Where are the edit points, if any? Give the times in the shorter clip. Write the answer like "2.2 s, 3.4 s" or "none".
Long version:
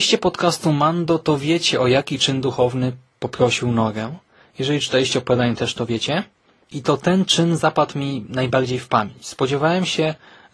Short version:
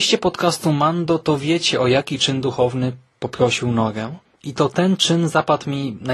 4.3 s